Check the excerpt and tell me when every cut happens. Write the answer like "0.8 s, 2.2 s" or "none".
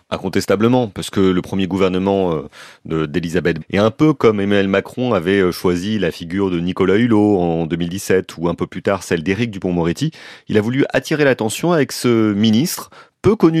3.6 s

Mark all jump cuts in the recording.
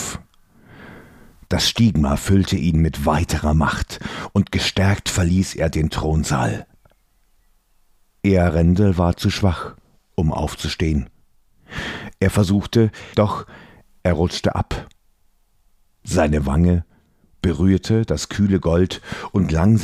13.1 s

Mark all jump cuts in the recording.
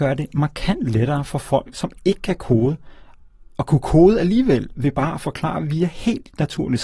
none

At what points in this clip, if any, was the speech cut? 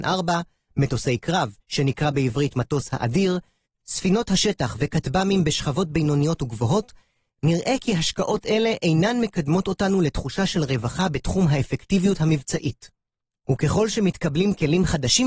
1.6 s, 13.4 s

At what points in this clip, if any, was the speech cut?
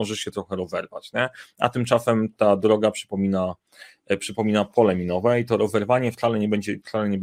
none

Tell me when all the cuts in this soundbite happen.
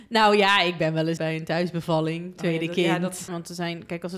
1.2 s, 3.3 s

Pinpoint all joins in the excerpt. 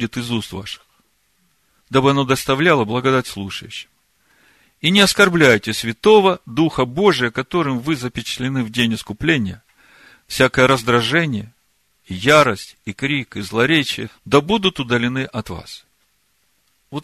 1.8 s, 12.8 s, 14.1 s

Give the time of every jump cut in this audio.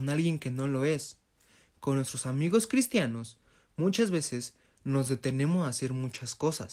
none

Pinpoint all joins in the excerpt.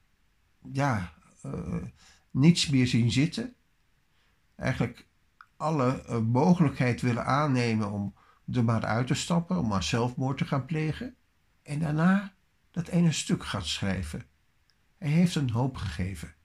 11.5 s, 14.8 s

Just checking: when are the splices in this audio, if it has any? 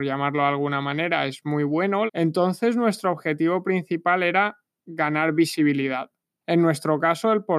2.1 s, 6.4 s

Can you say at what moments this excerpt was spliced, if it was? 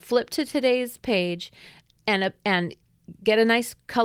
none

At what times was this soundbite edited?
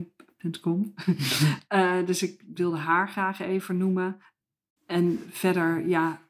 none

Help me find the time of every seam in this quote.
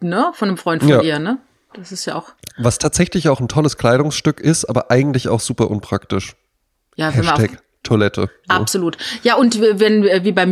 none

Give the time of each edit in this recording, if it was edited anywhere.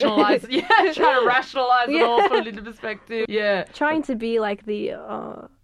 3.3 s

